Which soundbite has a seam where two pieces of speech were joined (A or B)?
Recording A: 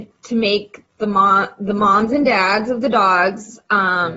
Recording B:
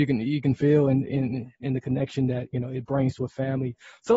B